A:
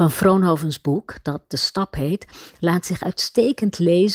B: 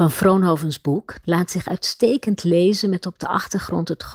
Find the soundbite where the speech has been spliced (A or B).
B